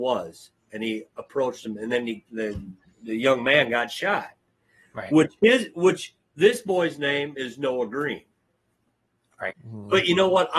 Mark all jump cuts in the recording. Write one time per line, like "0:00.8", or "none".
0:09.5